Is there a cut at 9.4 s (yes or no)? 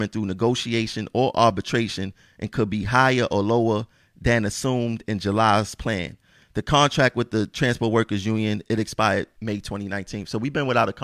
yes